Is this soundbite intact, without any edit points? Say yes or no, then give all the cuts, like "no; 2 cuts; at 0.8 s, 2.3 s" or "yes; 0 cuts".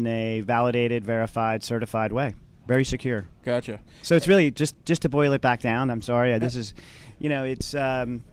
yes; 0 cuts